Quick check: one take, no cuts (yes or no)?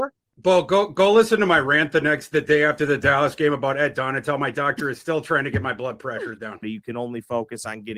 no